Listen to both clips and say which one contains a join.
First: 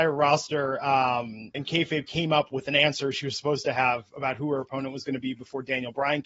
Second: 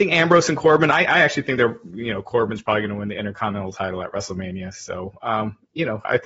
first; 1 cut; at 1.5 s

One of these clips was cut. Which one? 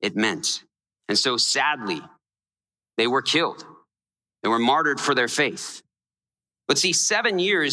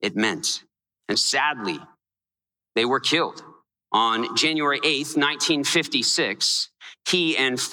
second; 2 cuts; at 1.1 s, 3.9 s

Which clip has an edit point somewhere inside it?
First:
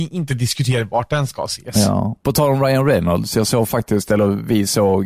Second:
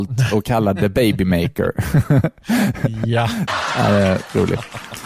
second; 1 cut; at 3.5 s

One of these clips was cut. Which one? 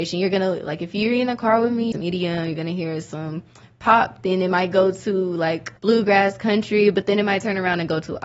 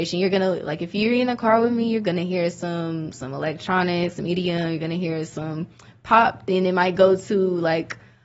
first; 2 cuts; at 1.9 s, 5.8 s

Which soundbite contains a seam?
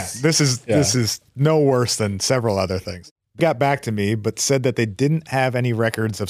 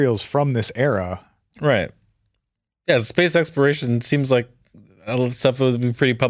first; 1 cut; at 3.4 s

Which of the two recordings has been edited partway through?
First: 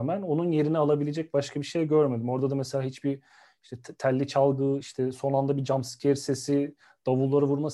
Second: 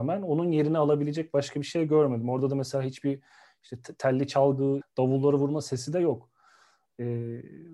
second; 1 cut; at 4.8 s

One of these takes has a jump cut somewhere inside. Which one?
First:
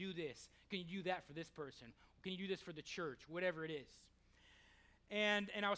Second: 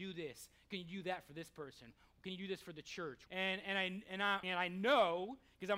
second; 2 cuts; at 3.3 s, 4.4 s

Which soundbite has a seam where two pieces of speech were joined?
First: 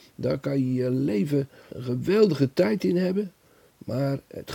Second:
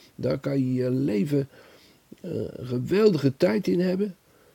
first; 1 cut; at 1.7 s

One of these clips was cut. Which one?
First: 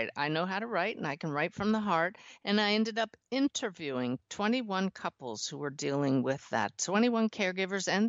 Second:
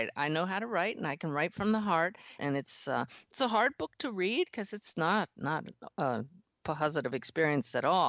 second; 1 cut; at 2.4 s

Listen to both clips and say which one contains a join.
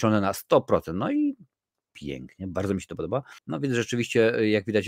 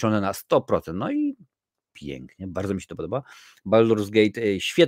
first; 1 cut; at 3.4 s

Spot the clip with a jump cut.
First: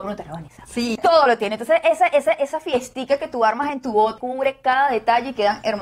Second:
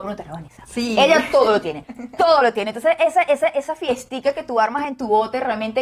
first; 2 cuts; at 1.0 s, 4.2 s

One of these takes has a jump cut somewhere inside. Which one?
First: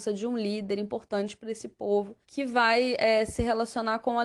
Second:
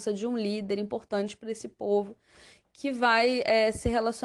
first; 1 cut; at 2.2 s

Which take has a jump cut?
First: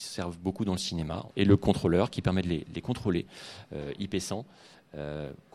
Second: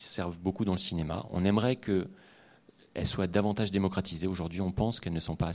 first; 1 cut; at 1.3 s

